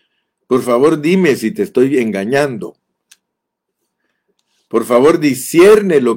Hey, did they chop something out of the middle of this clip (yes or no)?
no